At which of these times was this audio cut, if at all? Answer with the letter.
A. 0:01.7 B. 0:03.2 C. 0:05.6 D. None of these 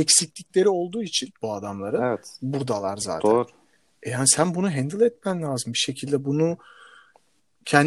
D